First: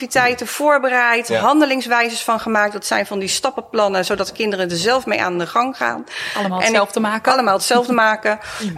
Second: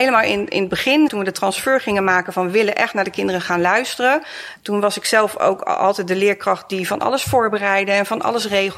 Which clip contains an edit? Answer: second; 1 cut; at 1.1 s

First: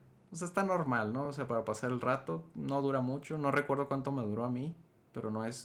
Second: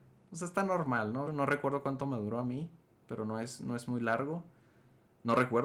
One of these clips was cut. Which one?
second; 1 cut; at 1.3 s

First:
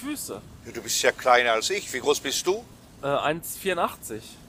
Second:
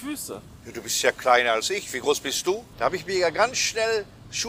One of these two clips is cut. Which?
second; 1 cut; at 2.7 s

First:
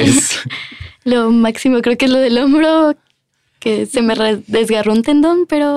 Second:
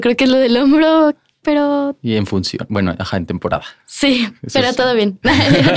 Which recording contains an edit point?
second; 1 cut; at 1.4 s

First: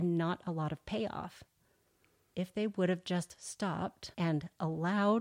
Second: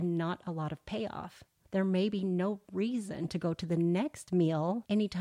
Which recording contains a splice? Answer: second; 1 cut; at 1.7 s

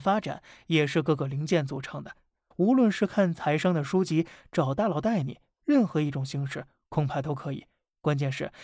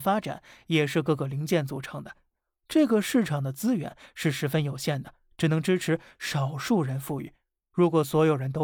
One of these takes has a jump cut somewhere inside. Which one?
first; 1 cut; at 2.5 s

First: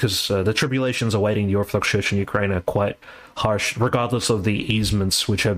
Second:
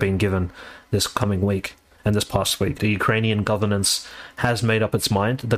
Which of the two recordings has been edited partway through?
second; 1 cut; at 2.8 s

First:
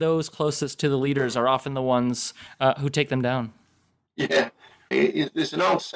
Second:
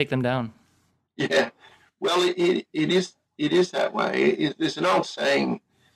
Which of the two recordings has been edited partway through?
first; 1 cut; at 4.9 s

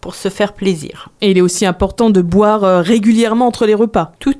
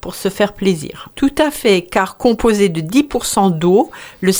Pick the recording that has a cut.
second; 1 cut; at 1.1 s

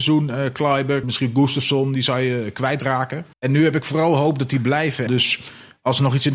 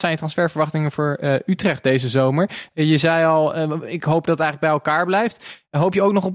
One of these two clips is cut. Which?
first; 3 cuts; at 1.0 s, 3.3 s, 5.1 s

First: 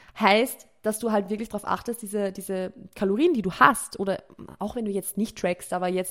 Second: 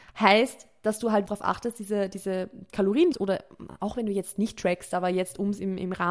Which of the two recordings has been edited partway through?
second; 2 cuts; at 1.3 s, 3.1 s

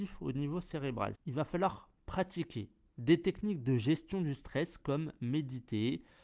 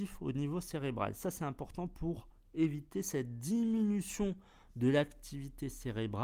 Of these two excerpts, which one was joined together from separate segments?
first; 1 cut; at 1.2 s

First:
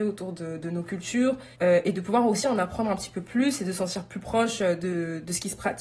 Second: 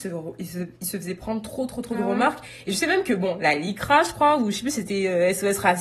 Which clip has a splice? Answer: first; 1 cut; at 1.5 s

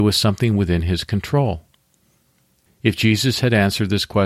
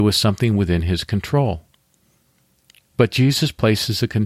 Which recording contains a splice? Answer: first; 1 cut; at 2.7 s

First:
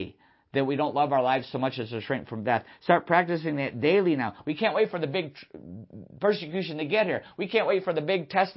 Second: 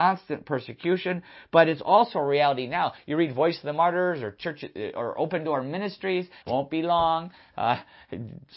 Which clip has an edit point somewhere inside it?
second; 1 cut; at 6.4 s

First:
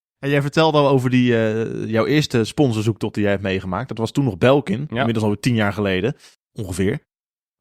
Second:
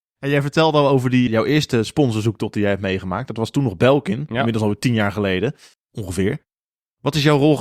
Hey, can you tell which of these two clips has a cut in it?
second; 1 cut; at 1.3 s

